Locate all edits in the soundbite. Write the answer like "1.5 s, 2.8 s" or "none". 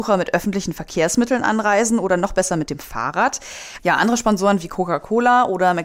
3.8 s